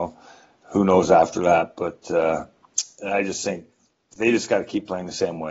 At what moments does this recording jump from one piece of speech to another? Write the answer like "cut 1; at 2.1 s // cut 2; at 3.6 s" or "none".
none